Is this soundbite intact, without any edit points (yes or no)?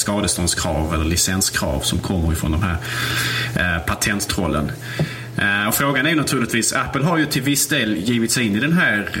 yes